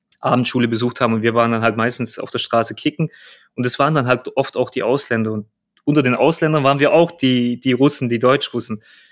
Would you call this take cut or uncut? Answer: uncut